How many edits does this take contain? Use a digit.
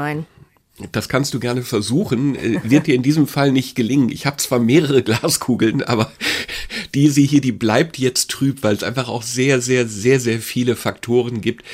0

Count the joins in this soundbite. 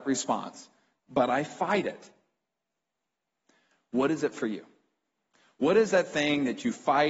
1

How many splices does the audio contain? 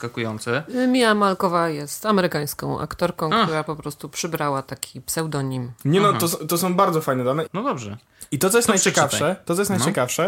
1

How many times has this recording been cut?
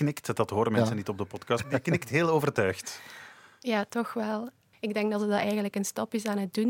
2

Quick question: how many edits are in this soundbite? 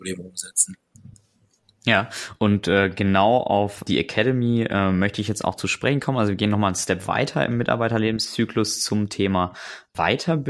0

